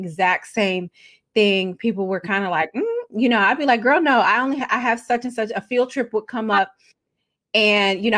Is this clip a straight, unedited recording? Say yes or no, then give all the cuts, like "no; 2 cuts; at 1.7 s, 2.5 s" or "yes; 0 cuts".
yes; 0 cuts